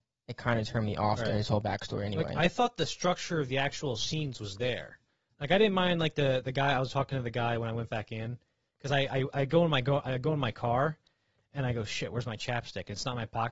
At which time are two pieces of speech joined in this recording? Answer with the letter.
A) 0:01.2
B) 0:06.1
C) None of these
C